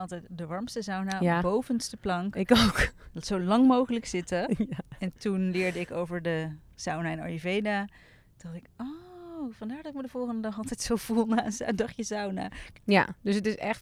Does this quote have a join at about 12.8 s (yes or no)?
yes